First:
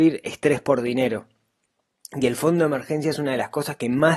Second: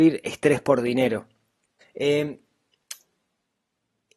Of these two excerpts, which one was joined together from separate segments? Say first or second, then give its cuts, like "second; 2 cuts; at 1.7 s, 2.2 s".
second; 1 cut; at 1.8 s